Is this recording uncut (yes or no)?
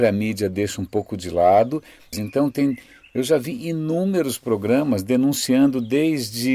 no